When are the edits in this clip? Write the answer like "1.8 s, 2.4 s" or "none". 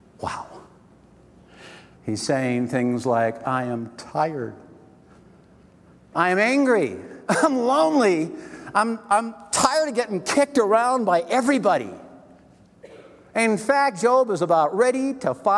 2.0 s